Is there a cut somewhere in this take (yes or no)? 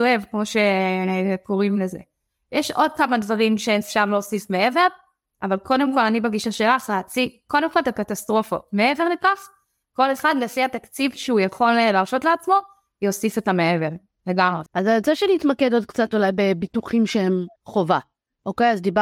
yes